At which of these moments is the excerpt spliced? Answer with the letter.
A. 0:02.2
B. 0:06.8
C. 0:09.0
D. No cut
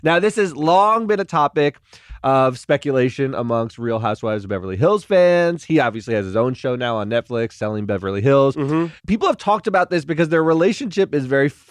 C